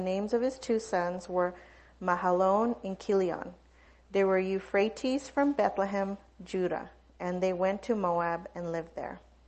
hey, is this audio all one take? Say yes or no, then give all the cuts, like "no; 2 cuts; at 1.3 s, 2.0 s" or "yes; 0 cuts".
yes; 0 cuts